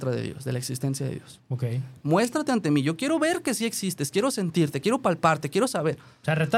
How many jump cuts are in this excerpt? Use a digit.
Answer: 0